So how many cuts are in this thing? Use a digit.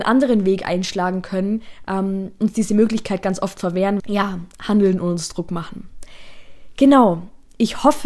1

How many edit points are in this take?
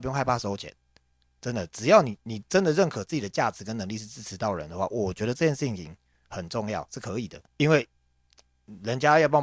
1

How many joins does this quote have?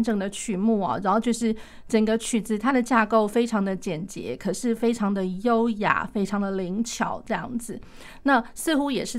0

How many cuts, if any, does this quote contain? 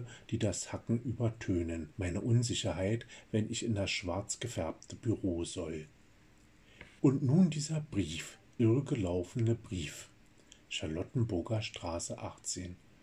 3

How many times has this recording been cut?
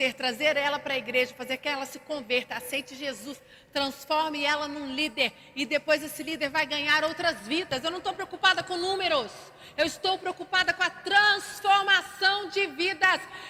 0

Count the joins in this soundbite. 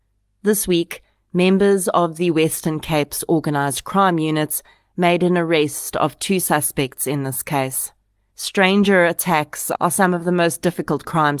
1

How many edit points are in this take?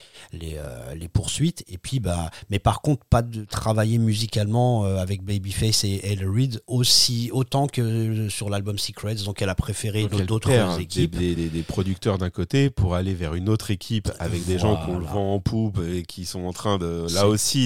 0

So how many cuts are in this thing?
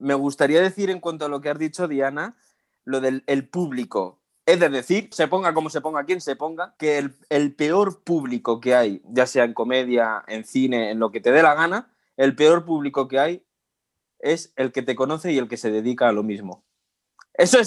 3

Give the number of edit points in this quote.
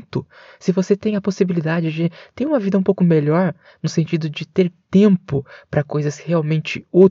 0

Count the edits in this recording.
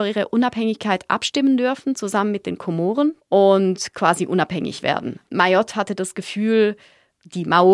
2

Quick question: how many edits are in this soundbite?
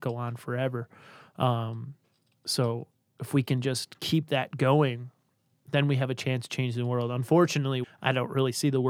1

